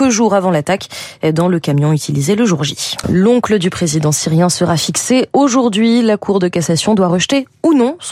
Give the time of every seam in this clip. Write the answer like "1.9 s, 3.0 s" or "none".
3.0 s